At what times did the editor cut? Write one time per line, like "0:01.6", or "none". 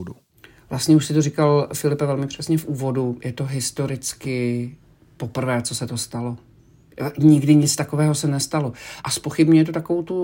0:09.0